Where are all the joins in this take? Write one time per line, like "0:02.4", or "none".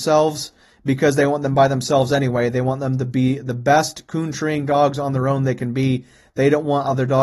none